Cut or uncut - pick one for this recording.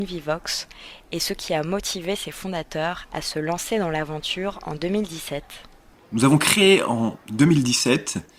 cut